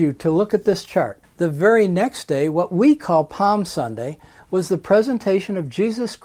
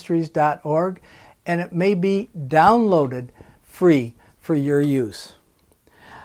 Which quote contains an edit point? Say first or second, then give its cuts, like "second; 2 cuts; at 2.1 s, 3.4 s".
first; 1 cut; at 1.2 s